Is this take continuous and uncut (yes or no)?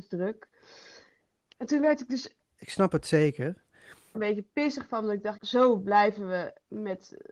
no